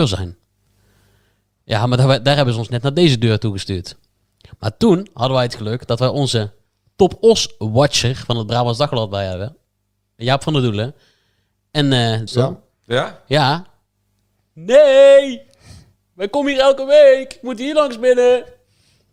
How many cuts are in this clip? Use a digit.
1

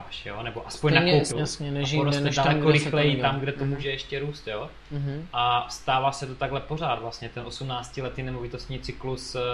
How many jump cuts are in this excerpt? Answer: 1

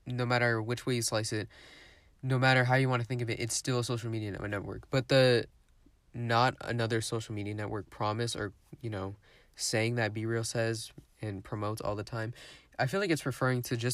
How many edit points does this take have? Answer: 0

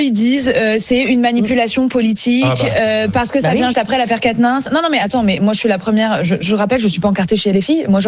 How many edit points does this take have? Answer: 1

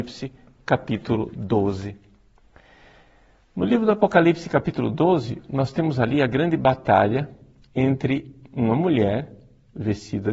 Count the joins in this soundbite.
0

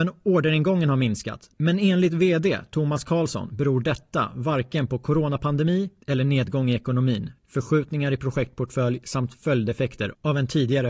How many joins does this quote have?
1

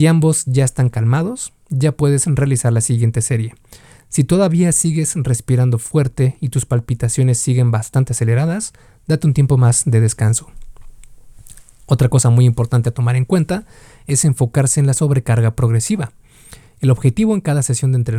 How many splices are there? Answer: 0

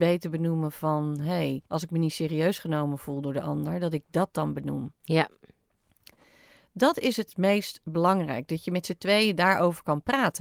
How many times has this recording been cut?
2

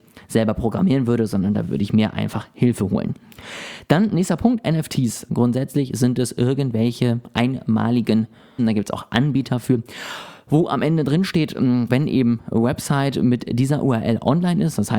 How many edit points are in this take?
3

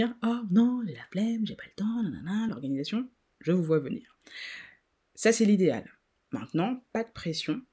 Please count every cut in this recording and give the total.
0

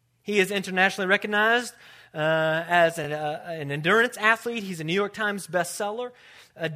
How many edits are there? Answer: 0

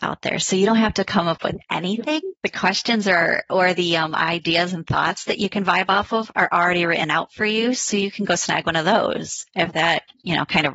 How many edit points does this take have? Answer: 1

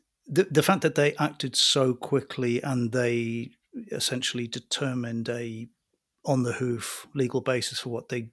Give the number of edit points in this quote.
0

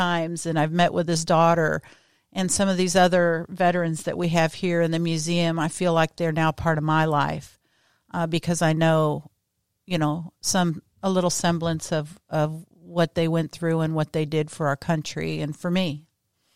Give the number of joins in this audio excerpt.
0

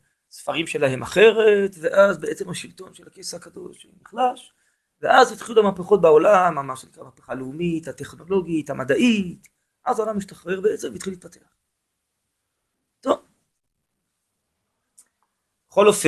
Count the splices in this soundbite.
0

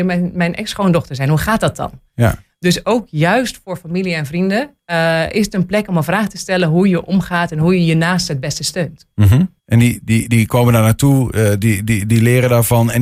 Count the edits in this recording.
1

